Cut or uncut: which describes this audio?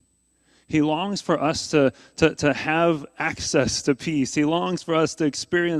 uncut